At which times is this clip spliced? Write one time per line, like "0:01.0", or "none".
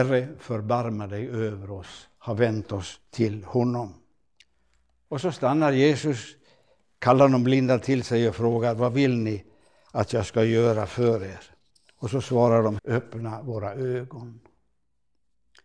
0:12.8